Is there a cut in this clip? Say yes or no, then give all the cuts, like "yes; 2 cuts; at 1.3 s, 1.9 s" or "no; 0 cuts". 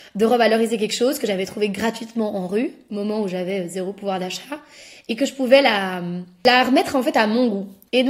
no; 0 cuts